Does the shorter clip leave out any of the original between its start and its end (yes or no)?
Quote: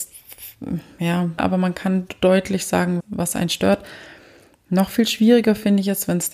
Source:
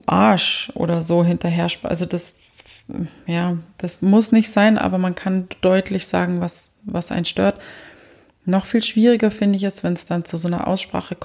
yes